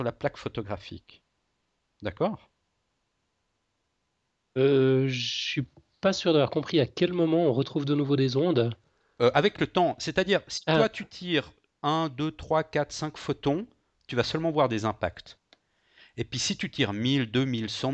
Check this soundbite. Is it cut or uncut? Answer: uncut